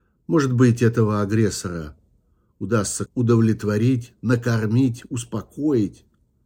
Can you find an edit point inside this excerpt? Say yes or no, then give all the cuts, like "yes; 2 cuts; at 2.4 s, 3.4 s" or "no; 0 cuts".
yes; 1 cut; at 3.1 s